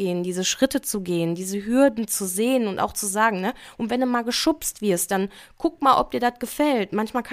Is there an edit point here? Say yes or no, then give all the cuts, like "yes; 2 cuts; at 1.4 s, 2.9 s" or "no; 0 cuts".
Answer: no; 0 cuts